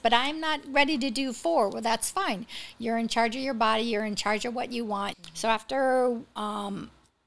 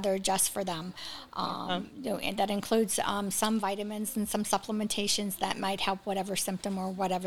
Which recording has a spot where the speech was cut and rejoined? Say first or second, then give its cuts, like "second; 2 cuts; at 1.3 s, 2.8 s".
first; 1 cut; at 5.1 s